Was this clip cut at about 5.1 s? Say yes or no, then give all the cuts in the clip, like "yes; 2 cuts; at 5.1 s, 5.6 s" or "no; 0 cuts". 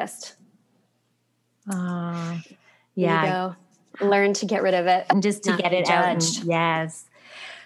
yes; 1 cut; at 5.1 s